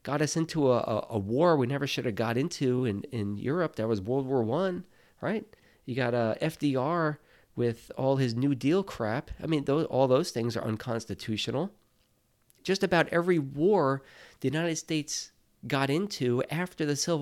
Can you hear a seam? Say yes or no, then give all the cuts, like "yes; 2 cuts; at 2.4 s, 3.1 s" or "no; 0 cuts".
no; 0 cuts